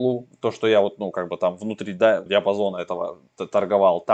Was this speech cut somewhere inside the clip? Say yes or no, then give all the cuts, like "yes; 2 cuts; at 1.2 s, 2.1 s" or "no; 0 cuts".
yes; 1 cut; at 2.3 s